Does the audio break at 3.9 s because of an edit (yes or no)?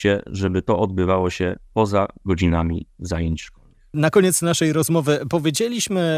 yes